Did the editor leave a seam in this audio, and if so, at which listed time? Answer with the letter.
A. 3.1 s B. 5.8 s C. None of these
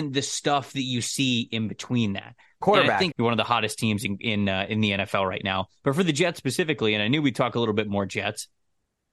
A